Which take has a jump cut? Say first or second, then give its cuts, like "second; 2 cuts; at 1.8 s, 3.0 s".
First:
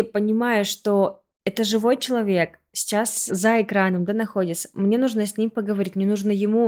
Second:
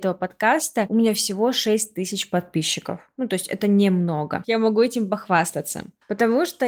second; 1 cut; at 4.4 s